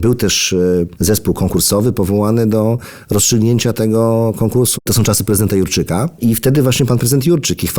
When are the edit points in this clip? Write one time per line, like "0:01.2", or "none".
0:04.7